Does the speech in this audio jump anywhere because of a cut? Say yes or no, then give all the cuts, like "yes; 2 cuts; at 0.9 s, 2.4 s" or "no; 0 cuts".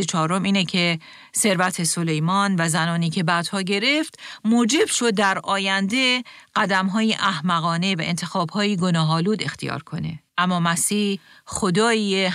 yes; 1 cut; at 10.3 s